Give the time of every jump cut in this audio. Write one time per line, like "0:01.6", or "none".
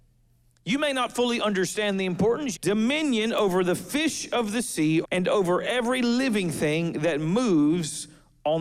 0:02.5
0:05.0